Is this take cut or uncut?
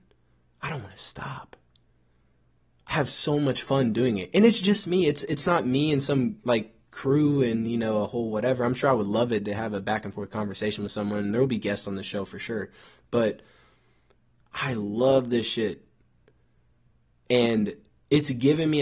uncut